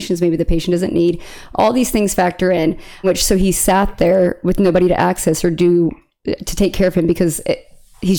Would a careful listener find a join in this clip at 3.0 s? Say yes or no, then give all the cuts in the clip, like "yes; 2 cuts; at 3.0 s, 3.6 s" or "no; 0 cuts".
yes; 1 cut; at 3.0 s